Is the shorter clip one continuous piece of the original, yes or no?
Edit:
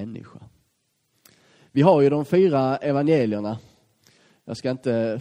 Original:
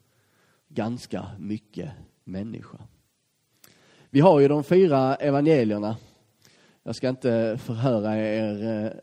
yes